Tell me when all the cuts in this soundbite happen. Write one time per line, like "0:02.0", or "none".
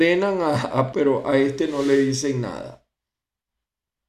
0:00.9